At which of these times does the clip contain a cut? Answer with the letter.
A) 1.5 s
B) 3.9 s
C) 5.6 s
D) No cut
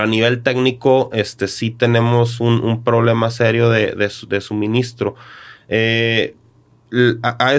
D